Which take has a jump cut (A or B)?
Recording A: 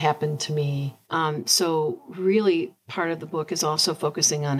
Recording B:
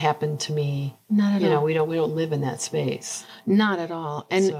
A